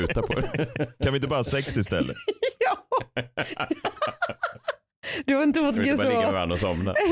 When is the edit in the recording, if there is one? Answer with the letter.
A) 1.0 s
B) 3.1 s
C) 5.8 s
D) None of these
C